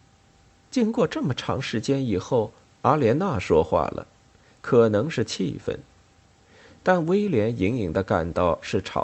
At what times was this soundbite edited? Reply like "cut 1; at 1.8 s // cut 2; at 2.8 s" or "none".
cut 1; at 4.6 s